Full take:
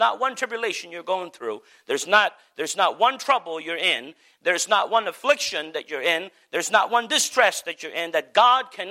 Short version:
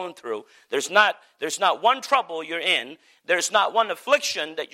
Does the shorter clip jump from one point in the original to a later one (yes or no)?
no